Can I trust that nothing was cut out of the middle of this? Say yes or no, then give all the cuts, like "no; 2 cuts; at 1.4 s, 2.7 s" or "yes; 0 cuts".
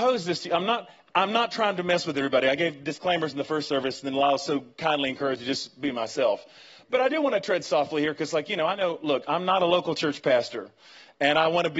yes; 0 cuts